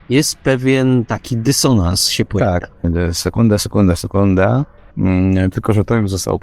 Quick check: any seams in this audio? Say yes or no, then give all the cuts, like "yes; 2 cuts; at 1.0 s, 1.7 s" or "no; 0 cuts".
yes; 2 cuts; at 2.8 s, 4.9 s